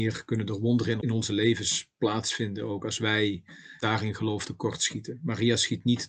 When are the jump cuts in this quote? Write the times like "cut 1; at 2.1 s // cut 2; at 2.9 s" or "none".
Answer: cut 1; at 1.0 s